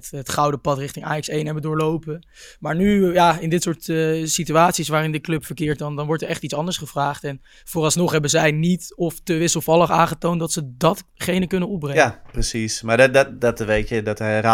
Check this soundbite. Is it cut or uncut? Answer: uncut